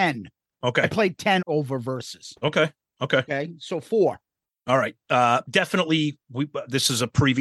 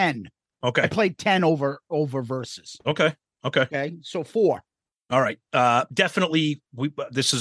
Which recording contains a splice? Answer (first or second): first